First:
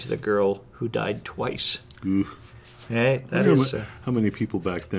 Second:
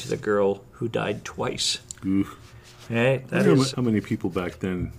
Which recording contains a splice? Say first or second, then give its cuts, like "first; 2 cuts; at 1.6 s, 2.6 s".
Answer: second; 1 cut; at 3.7 s